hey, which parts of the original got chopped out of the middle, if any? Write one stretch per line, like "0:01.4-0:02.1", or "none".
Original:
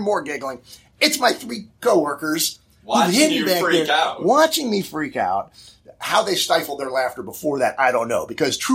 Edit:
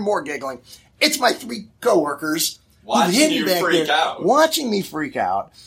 none